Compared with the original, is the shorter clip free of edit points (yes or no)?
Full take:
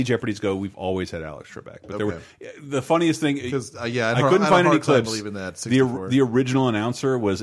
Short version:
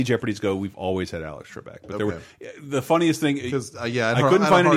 yes